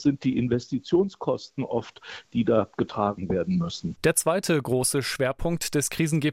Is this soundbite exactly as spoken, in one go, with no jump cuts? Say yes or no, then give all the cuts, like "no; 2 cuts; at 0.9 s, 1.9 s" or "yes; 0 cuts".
yes; 0 cuts